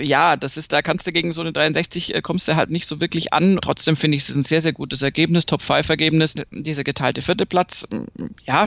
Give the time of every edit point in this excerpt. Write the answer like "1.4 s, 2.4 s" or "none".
3.6 s, 6.4 s